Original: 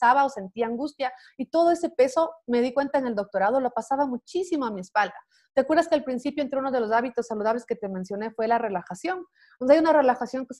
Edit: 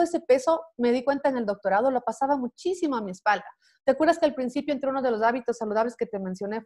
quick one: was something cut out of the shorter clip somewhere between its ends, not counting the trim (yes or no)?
no